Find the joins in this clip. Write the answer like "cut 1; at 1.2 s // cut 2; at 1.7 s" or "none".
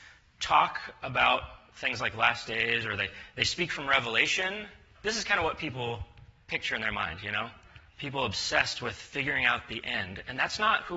cut 1; at 4.9 s // cut 2; at 7.9 s